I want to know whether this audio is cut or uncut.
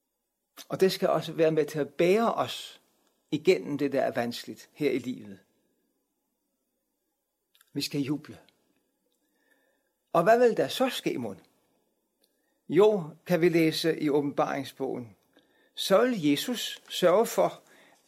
uncut